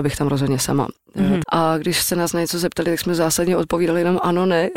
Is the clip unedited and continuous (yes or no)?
no